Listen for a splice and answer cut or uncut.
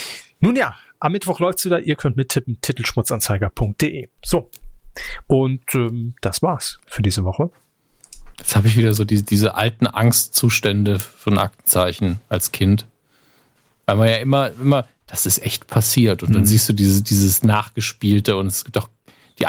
cut